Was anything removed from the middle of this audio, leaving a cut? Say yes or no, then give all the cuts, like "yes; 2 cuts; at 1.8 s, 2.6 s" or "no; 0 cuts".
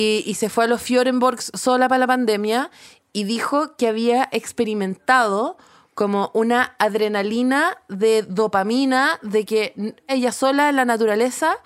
yes; 1 cut; at 10.1 s